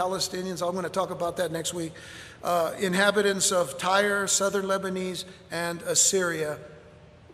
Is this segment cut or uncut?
uncut